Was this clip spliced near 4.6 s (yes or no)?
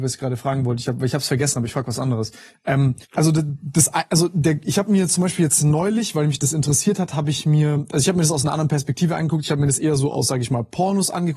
no